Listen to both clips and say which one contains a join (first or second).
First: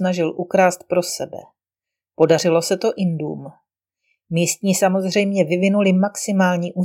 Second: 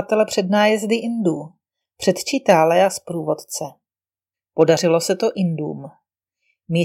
second